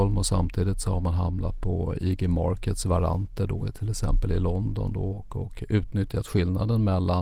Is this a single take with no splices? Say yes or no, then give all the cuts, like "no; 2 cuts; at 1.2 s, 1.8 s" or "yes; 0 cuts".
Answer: yes; 0 cuts